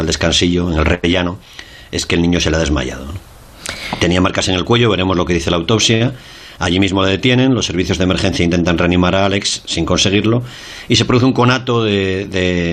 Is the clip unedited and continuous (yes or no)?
yes